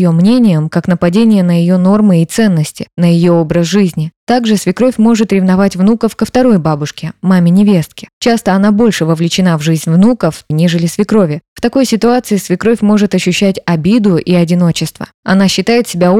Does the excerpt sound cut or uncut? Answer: cut